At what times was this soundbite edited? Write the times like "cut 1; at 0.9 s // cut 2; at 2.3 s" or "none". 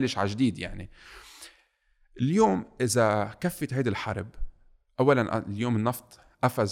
none